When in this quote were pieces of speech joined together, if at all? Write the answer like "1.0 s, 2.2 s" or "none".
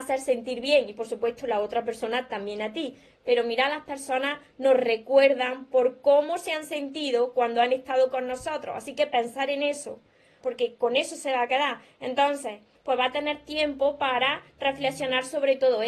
10.4 s, 12.7 s